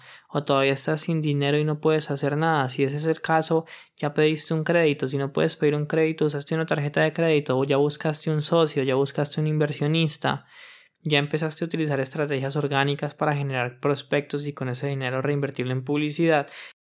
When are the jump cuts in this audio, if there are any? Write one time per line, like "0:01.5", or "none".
none